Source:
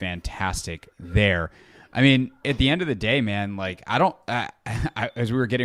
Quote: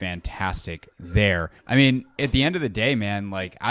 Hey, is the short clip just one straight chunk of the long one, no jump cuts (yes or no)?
no